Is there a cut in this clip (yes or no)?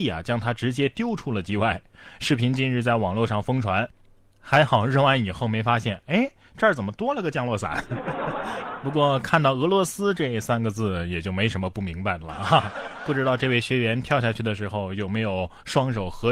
no